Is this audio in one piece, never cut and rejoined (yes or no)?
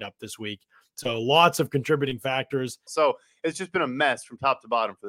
no